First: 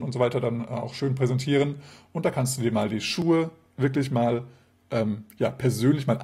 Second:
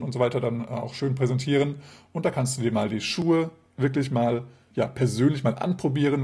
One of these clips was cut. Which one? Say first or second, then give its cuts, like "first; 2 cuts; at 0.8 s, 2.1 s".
second; 1 cut; at 4.7 s